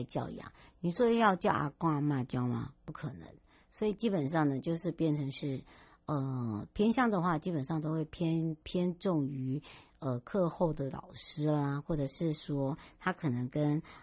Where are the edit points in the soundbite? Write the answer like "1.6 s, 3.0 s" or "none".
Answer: none